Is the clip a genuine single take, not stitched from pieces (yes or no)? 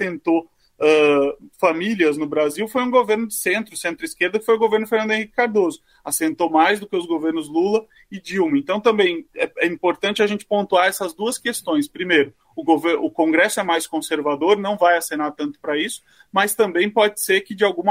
yes